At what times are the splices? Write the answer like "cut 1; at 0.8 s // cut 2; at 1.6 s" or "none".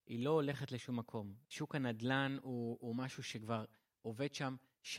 cut 1; at 1.4 s